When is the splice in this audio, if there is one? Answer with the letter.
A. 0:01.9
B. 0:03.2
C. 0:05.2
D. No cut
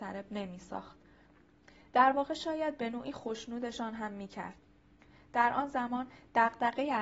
D